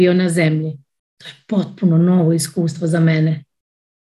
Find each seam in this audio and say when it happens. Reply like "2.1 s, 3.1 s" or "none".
none